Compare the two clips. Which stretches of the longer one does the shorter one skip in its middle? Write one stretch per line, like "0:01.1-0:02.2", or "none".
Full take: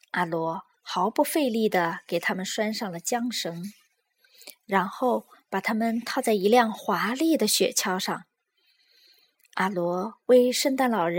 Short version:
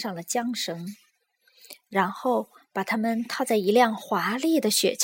none